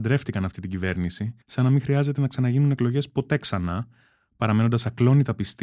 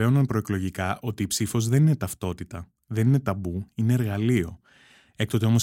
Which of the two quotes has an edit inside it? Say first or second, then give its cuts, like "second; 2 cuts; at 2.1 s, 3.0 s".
first; 1 cut; at 1.4 s